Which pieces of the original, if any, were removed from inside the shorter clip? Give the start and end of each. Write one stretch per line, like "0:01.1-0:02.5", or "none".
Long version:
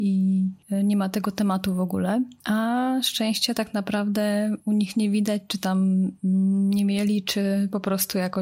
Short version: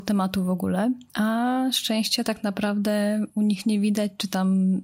none